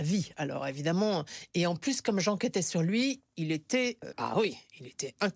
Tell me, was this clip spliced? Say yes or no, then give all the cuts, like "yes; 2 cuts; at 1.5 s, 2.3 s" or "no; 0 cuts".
yes; 1 cut; at 4.1 s